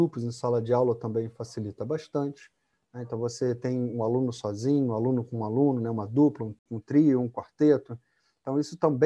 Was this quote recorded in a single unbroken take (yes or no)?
yes